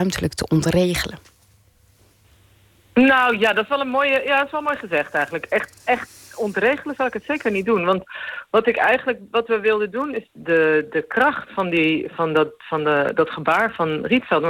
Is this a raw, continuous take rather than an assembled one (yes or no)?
yes